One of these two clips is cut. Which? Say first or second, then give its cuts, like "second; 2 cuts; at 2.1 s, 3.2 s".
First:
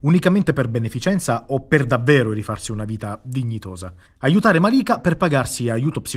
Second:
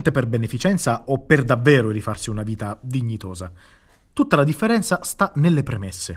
first; 1 cut; at 4.1 s